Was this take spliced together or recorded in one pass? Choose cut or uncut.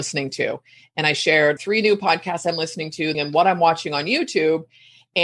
cut